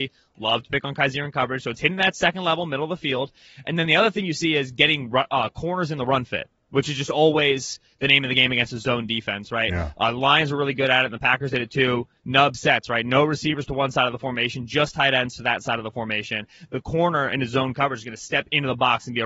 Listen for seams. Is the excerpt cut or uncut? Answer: uncut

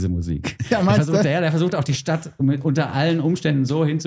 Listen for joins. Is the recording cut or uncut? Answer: uncut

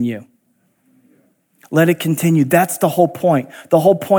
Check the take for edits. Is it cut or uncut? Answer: uncut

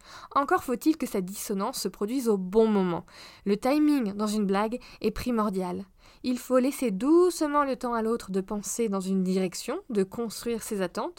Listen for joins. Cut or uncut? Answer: uncut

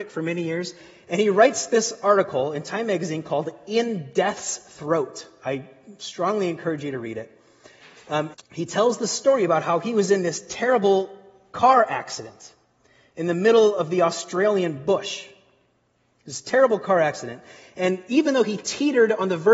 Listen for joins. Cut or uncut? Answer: cut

